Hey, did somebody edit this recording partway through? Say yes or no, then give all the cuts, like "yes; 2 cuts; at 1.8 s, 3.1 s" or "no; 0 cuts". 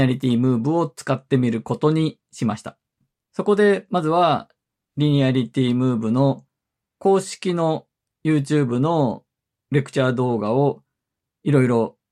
no; 0 cuts